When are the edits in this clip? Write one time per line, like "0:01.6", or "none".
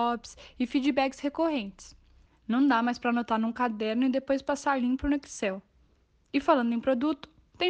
0:02.3